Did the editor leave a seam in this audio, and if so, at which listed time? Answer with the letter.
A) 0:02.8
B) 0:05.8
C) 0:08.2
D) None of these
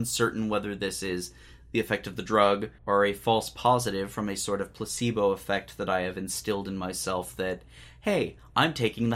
A